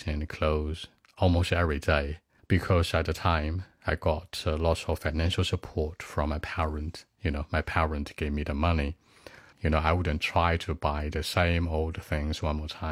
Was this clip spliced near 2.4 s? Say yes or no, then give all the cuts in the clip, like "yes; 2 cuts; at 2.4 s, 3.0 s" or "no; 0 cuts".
yes; 2 cuts; at 2.4 s, 9.5 s